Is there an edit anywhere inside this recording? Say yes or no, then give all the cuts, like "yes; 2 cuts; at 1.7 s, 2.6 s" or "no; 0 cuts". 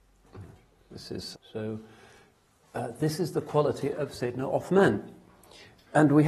yes; 1 cut; at 1.3 s